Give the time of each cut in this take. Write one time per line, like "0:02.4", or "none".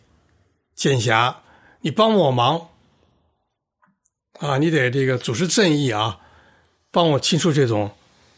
none